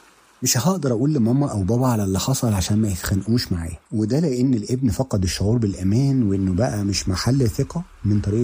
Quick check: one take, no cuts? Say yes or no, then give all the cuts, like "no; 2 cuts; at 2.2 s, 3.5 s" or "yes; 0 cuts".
no; 1 cut; at 3.9 s